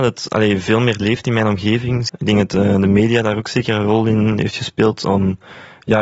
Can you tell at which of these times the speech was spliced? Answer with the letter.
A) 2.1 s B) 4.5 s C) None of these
A